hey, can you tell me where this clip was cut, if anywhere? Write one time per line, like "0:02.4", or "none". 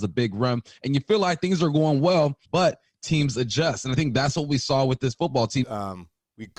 0:02.5
0:05.6